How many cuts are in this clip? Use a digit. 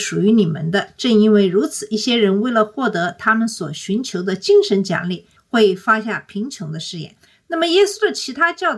0